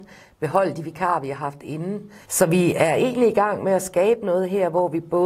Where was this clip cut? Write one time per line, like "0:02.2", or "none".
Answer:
0:02.2